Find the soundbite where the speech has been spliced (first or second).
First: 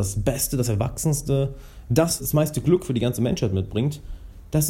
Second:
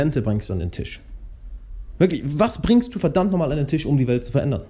first